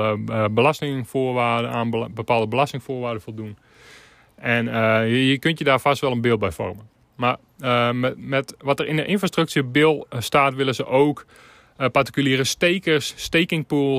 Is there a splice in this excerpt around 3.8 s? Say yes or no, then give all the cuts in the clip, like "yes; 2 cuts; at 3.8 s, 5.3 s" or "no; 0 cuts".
no; 0 cuts